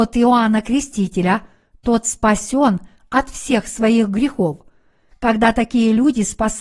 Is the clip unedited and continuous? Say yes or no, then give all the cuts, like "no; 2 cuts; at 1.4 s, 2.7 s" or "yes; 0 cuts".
yes; 0 cuts